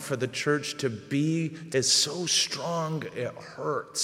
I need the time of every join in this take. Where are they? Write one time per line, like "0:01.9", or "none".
0:01.7